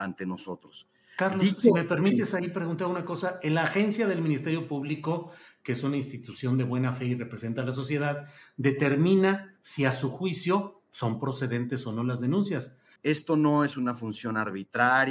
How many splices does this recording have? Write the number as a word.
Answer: one